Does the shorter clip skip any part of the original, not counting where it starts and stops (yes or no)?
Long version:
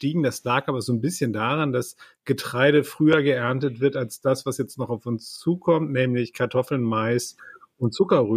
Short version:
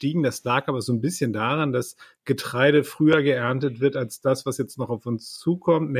no